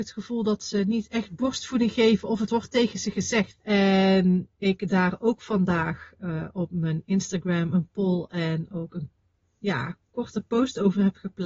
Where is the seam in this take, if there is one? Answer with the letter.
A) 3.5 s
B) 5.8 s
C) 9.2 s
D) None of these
A